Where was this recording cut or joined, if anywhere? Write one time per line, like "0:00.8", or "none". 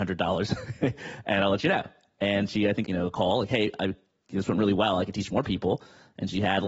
0:02.8